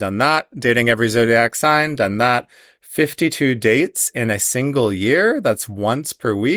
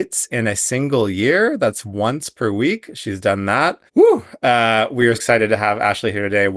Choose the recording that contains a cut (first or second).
second